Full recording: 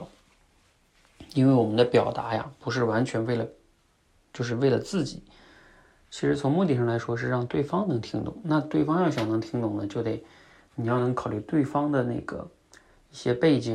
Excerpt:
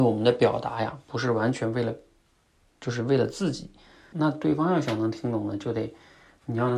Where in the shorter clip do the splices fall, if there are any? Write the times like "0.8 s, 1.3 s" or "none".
4.1 s